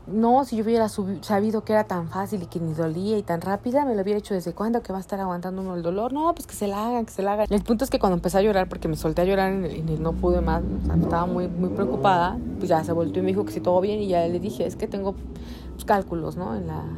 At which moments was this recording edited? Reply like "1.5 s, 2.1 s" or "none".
7.5 s, 10.0 s